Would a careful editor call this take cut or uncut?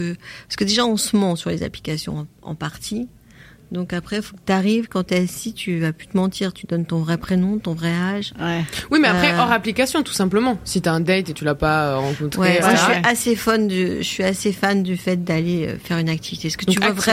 cut